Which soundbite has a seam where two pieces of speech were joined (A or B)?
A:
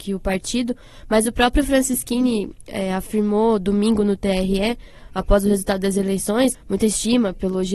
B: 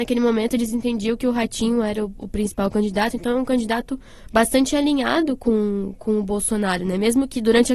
A